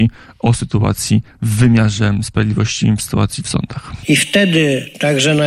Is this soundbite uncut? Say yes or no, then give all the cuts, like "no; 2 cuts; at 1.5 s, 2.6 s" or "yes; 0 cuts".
no; 1 cut; at 4.0 s